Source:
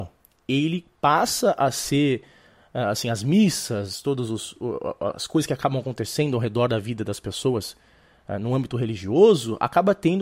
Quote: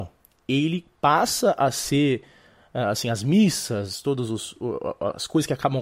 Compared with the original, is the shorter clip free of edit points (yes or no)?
yes